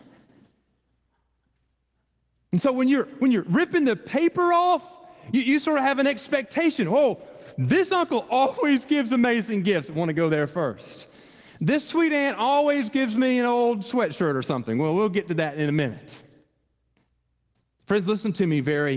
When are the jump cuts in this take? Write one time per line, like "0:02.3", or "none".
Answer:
none